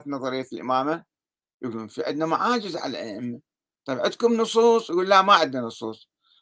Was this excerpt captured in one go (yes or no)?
yes